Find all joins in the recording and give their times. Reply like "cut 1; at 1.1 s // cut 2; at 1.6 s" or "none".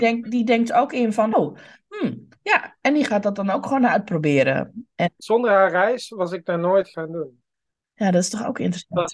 cut 1; at 1.3 s // cut 2; at 5.2 s